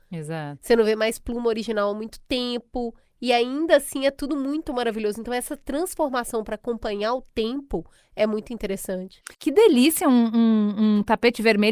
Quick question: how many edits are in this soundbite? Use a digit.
1